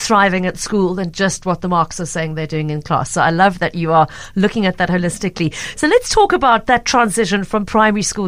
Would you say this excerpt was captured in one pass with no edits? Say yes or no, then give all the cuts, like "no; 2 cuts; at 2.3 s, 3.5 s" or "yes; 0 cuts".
yes; 0 cuts